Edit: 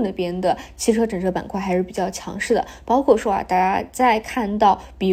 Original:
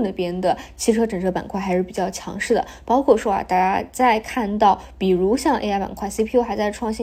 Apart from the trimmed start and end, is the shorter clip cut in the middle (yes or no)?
no